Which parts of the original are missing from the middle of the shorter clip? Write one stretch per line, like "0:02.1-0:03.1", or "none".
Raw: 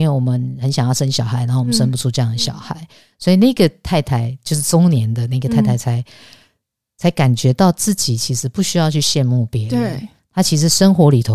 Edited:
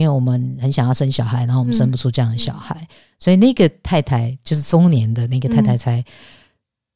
none